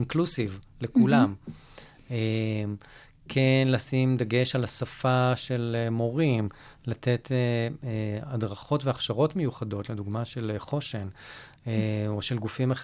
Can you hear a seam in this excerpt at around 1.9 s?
no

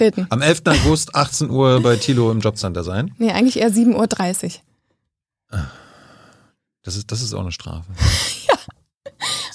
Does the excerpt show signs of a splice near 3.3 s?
no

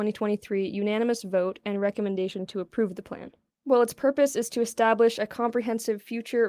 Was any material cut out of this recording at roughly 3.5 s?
yes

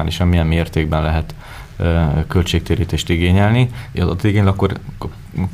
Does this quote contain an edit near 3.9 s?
yes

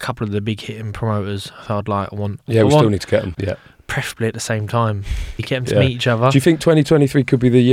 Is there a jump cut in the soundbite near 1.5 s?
no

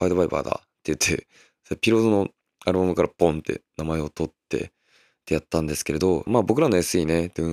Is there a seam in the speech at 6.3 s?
yes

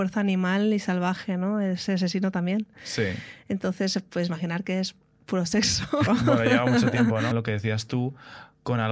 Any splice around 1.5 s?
no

